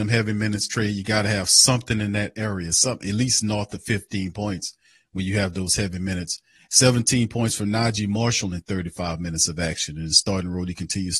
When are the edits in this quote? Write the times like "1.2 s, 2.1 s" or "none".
none